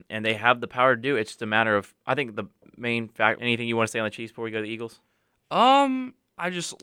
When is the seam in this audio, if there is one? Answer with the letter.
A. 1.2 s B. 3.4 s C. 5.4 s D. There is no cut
B